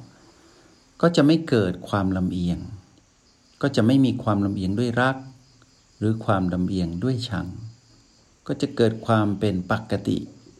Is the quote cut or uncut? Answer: uncut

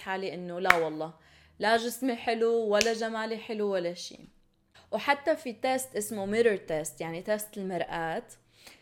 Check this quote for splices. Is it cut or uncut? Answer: uncut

